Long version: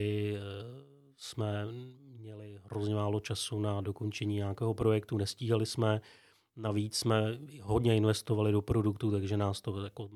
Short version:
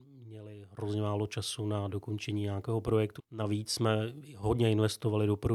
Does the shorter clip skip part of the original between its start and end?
yes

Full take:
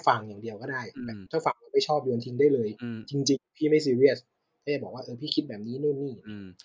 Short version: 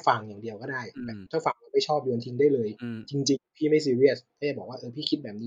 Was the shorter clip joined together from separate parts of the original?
yes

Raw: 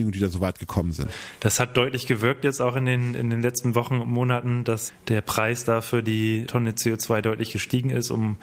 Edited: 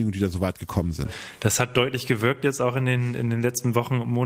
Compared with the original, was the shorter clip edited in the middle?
no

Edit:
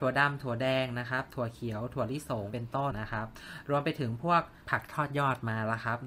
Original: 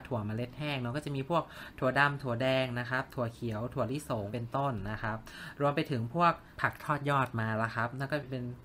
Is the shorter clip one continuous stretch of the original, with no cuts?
no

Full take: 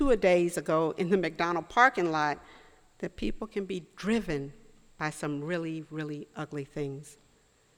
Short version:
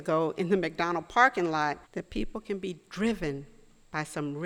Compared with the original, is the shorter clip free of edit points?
no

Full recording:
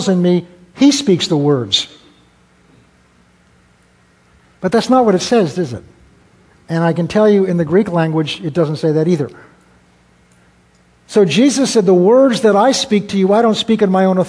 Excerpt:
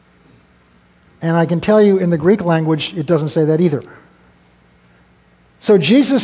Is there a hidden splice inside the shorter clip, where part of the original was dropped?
yes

